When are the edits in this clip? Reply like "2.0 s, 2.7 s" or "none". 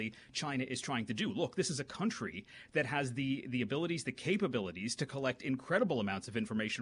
none